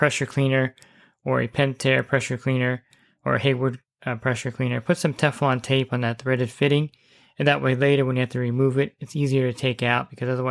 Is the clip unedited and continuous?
yes; 0 cuts

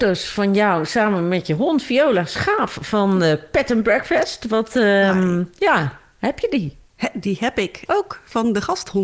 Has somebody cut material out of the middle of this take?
yes; 1 cut; at 7.9 s

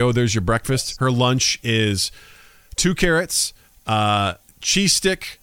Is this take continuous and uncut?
no; 1 cut; at 3.7 s

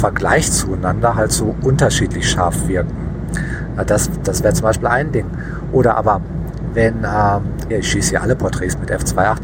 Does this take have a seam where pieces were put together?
yes; 1 cut; at 7.7 s

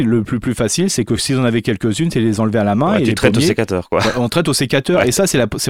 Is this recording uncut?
yes; 0 cuts

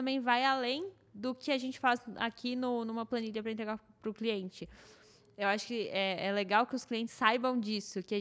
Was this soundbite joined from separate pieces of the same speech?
no; 0 cuts

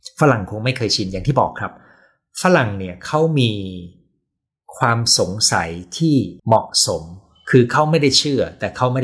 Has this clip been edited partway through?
yes; 1 cut; at 6.4 s

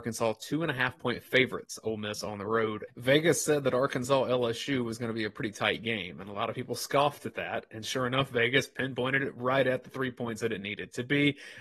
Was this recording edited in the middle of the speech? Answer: yes; 1 cut; at 2.9 s

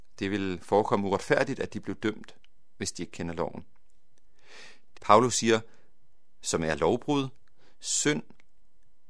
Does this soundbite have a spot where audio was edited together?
yes; 2 cuts; at 4.9 s, 6.4 s

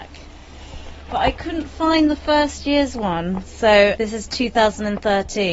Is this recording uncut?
no; 1 cut; at 4.0 s

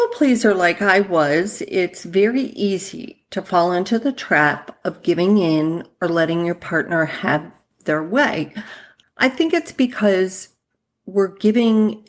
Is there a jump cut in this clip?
yes; 1 cut; at 9.0 s

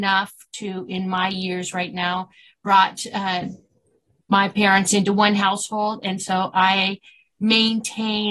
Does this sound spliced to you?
no; 0 cuts

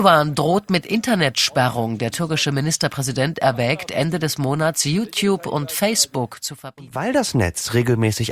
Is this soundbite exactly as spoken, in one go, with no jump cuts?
yes; 0 cuts

